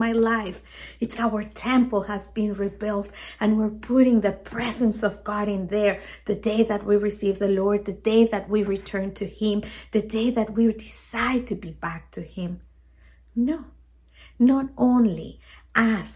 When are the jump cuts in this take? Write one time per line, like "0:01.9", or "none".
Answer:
0:01.1